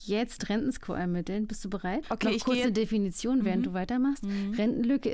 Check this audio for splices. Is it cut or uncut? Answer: cut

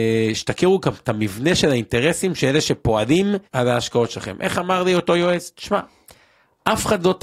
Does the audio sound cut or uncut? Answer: cut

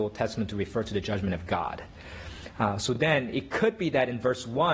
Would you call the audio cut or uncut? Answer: uncut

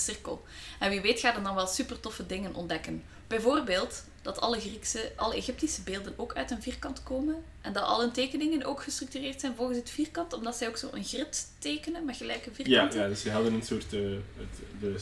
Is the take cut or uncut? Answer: cut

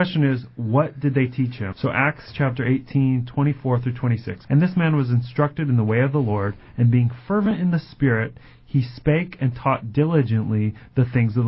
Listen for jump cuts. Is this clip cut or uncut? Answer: cut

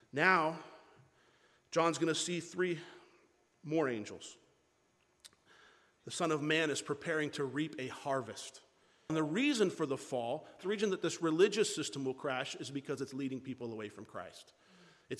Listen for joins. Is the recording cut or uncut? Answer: cut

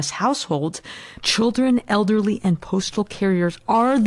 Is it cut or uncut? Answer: cut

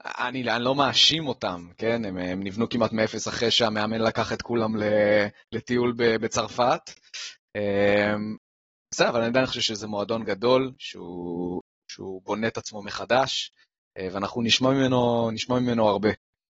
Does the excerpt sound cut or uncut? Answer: uncut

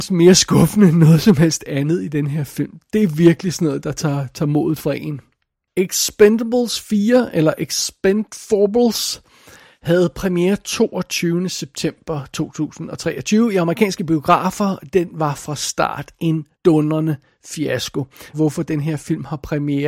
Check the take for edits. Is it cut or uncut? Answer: cut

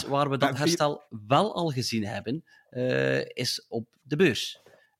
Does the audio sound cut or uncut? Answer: uncut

